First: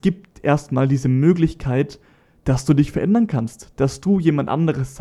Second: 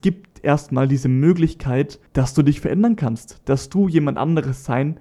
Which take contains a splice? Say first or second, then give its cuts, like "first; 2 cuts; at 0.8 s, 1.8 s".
second; 1 cut; at 2.1 s